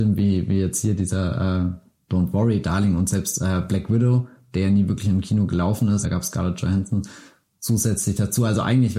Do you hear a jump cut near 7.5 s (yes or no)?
no